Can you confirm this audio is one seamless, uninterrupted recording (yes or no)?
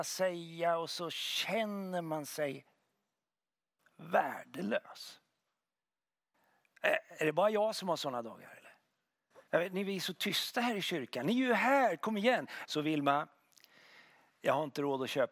no